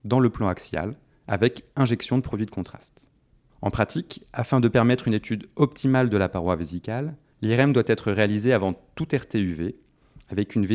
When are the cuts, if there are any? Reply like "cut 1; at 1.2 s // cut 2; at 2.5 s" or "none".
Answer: none